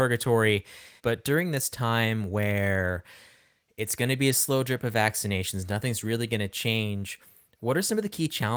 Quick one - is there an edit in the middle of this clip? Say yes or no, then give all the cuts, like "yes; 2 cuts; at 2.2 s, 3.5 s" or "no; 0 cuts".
yes; 1 cut; at 1.0 s